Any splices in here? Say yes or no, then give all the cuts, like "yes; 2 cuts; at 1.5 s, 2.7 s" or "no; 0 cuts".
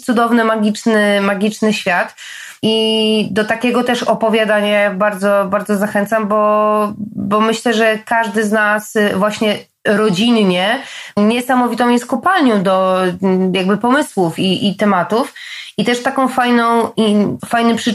no; 0 cuts